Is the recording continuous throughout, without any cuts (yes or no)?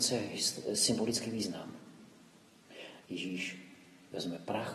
no